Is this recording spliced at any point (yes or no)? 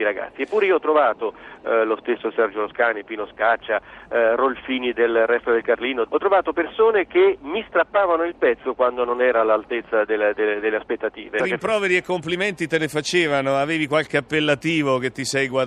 yes